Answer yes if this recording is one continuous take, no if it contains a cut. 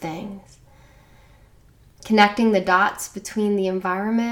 yes